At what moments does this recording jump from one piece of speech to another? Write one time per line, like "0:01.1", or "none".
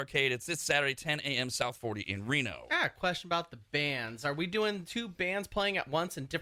none